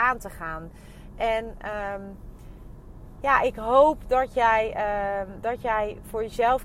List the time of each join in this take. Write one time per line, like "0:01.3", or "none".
none